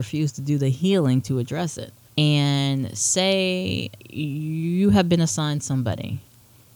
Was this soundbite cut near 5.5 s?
no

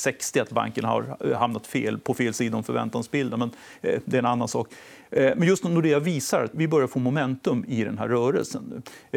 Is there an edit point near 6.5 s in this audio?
yes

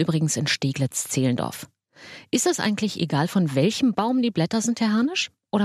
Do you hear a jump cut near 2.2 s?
no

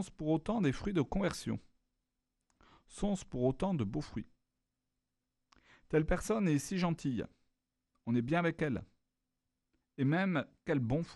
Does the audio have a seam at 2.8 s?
no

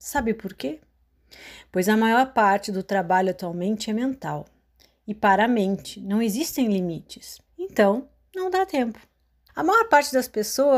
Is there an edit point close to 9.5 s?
yes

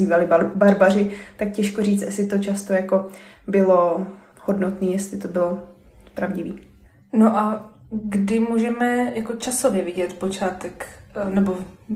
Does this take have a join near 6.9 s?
no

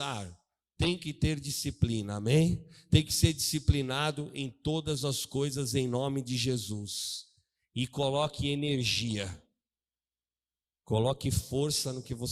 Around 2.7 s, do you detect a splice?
no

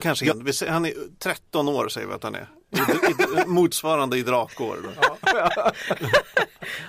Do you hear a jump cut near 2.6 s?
no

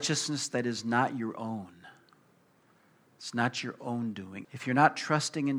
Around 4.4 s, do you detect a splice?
yes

